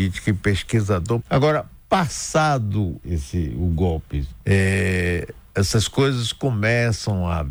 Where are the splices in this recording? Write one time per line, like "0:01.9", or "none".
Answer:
0:01.2
0:03.0
0:04.4